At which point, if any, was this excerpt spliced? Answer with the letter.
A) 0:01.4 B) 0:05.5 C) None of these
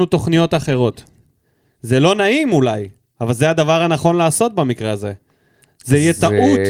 C